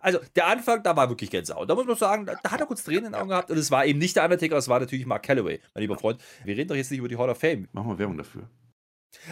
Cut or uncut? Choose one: cut